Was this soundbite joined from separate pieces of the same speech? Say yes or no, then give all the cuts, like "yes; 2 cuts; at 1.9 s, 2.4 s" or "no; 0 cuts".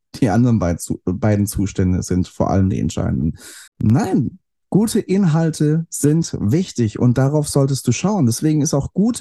yes; 1 cut; at 3.7 s